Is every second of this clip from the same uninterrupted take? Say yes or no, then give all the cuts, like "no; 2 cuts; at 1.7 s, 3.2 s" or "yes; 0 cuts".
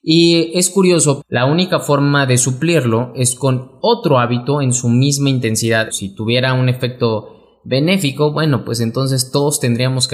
no; 2 cuts; at 1.2 s, 5.9 s